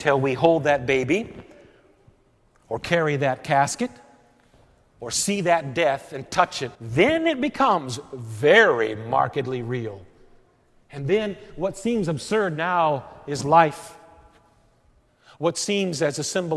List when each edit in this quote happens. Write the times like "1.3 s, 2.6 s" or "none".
6.8 s

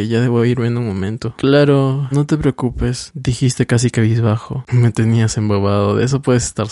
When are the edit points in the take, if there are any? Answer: 2.1 s, 4.7 s

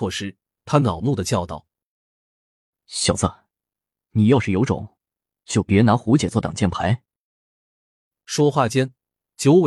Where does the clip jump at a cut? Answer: 7.5 s

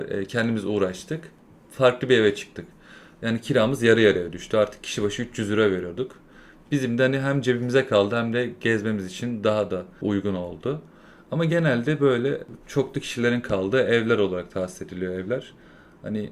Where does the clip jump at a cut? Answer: none

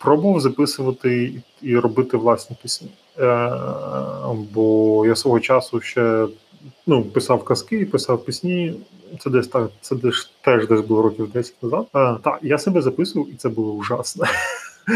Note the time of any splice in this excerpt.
11.9 s

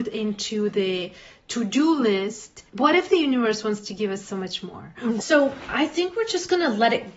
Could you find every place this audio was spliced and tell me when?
2.7 s, 5.2 s

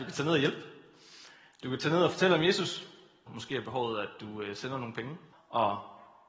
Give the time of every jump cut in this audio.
3.3 s, 5.3 s

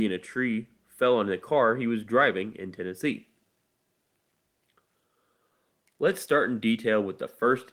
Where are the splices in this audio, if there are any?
none

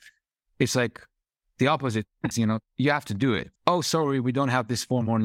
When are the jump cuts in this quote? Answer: 2.3 s, 3.6 s

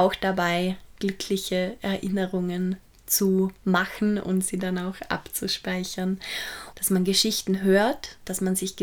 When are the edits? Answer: 3.6 s, 6.7 s

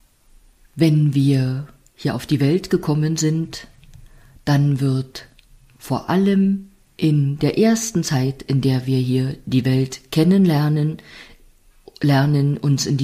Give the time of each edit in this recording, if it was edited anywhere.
none

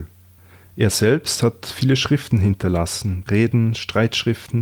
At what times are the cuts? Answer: 3.3 s

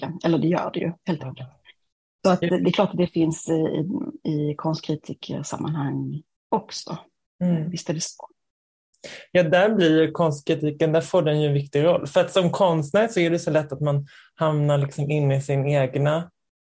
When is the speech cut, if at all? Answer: none

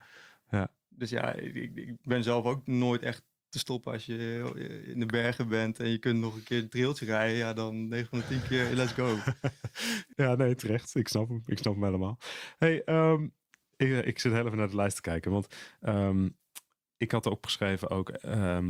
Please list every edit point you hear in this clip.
10.1 s

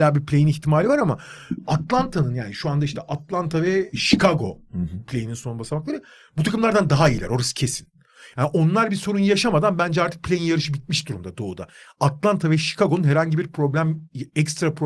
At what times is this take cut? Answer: none

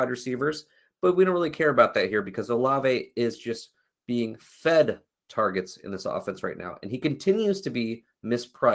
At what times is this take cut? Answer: none

